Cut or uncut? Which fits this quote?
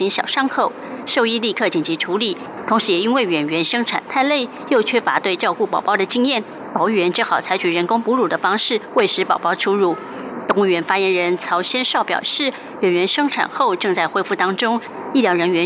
uncut